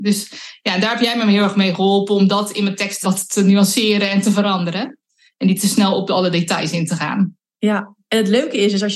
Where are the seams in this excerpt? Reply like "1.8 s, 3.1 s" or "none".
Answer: 3.0 s

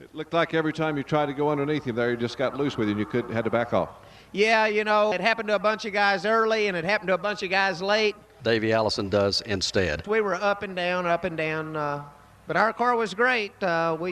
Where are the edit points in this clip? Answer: 5.1 s, 8.4 s, 10.0 s

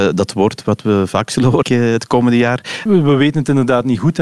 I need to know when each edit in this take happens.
1.6 s, 2.9 s

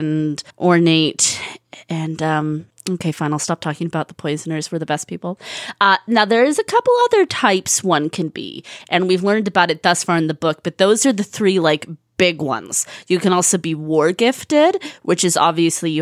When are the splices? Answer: none

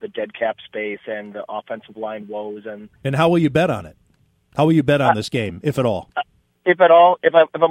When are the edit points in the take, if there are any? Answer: none

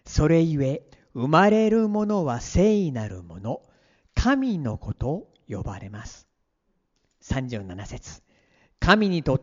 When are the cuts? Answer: none

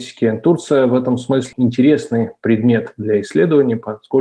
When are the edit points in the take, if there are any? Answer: 1.5 s

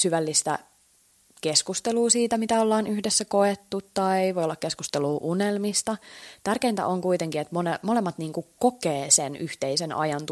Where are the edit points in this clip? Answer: none

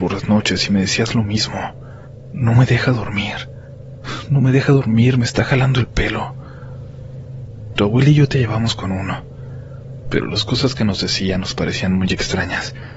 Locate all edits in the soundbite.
7.7 s

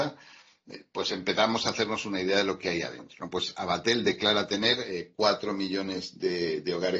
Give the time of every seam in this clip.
none

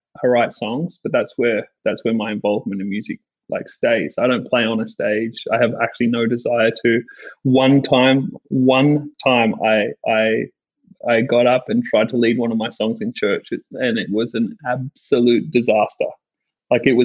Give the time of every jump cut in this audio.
none

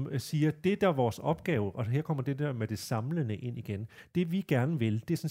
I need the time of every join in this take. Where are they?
none

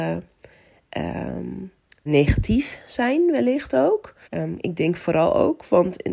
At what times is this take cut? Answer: 2.1 s, 4.2 s

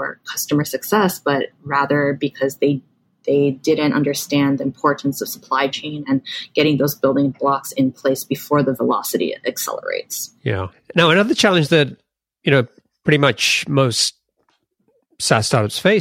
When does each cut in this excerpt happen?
none

